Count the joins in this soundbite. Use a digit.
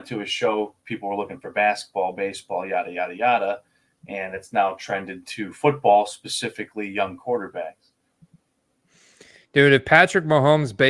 0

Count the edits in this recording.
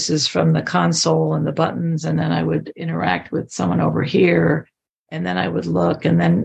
0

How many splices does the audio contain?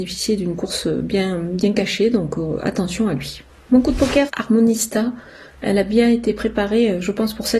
1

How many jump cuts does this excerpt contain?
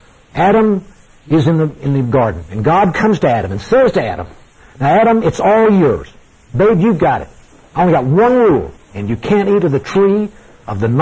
0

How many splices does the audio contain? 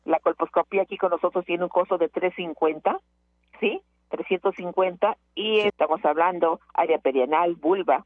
1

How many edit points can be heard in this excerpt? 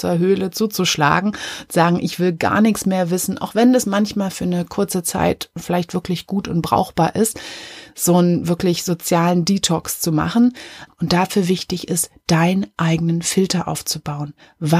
1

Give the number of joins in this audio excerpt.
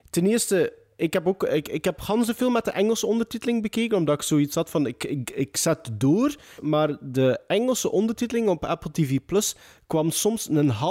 1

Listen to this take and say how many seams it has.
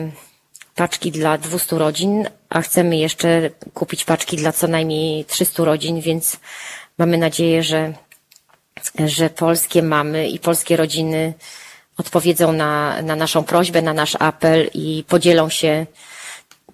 0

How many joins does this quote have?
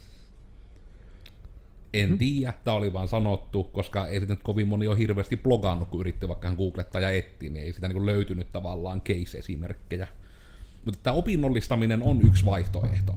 1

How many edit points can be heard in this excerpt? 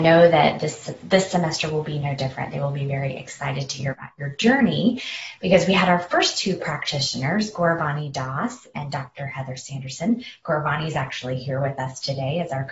0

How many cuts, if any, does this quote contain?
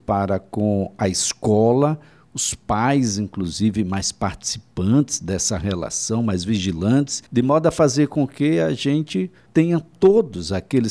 2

